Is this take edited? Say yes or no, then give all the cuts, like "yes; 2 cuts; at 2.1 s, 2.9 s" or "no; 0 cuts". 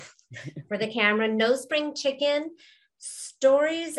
no; 0 cuts